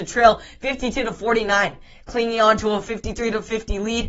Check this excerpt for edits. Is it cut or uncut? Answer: uncut